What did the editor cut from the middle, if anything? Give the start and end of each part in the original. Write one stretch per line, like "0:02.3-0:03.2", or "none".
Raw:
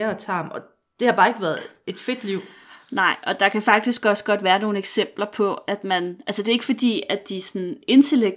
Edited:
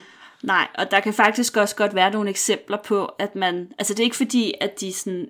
none